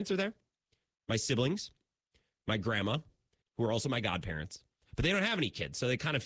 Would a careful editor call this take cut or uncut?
cut